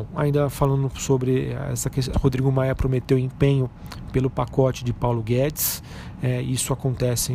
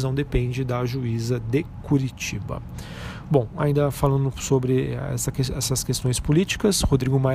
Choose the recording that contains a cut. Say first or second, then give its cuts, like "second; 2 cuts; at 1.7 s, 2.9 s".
first; 1 cut; at 2.1 s